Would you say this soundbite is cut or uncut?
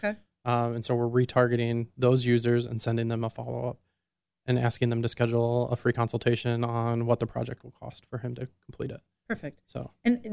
uncut